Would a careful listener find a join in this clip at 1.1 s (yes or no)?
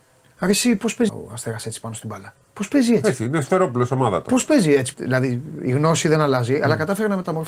yes